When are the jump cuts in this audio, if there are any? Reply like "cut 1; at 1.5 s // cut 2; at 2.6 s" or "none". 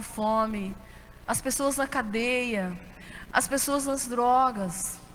cut 1; at 1.3 s